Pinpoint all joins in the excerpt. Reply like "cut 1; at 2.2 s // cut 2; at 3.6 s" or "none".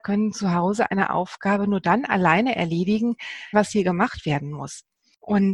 cut 1; at 3.5 s

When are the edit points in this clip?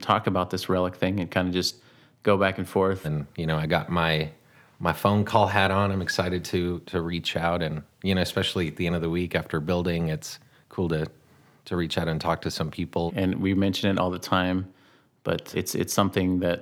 cut 1; at 3.0 s // cut 2; at 13.1 s // cut 3; at 15.5 s

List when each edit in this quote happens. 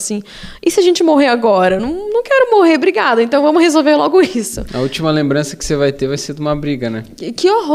none

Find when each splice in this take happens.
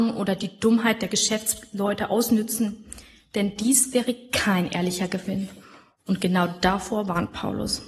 none

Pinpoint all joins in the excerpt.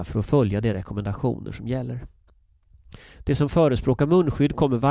none

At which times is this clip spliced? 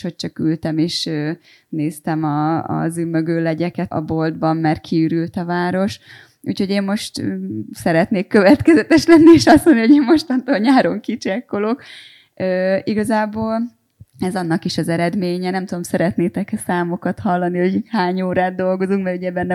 cut 1; at 3.9 s

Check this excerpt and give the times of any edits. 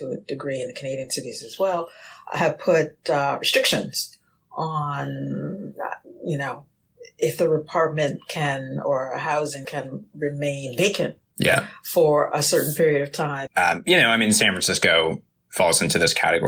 cut 1; at 9.6 s // cut 2; at 13.5 s

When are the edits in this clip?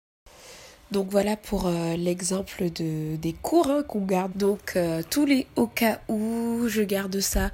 cut 1; at 4.3 s

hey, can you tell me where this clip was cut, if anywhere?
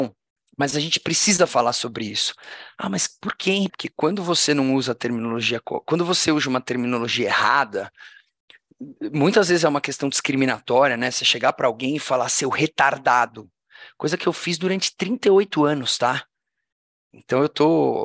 cut 1; at 3.7 s

